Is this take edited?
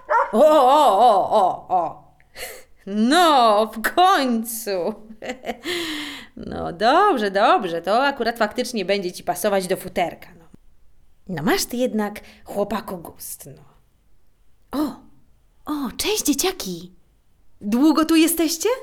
no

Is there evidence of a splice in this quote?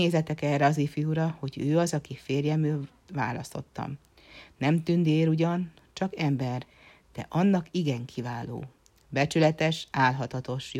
no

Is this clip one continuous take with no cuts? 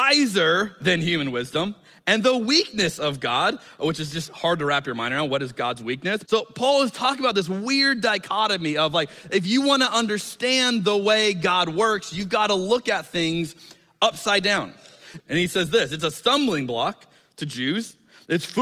no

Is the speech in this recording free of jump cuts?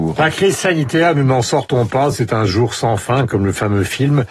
yes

